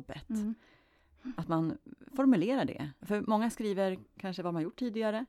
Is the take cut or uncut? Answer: cut